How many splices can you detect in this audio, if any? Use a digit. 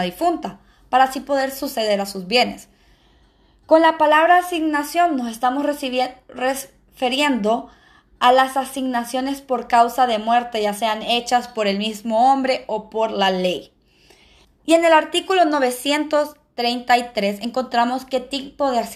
1